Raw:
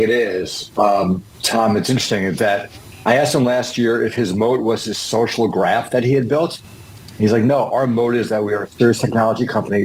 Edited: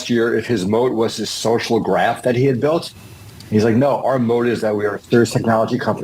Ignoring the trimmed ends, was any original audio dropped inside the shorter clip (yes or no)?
no